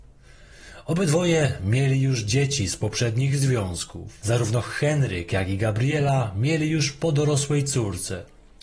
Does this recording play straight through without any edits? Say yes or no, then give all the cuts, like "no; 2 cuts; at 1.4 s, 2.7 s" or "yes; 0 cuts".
yes; 0 cuts